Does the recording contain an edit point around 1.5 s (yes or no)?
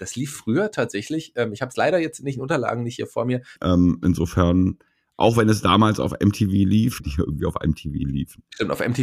no